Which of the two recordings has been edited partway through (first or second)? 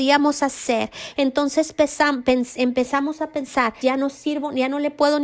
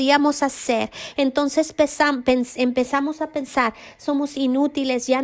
first